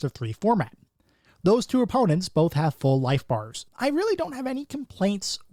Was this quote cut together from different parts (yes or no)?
yes